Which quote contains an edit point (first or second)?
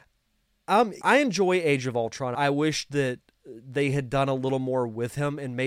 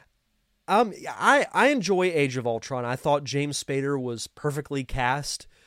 first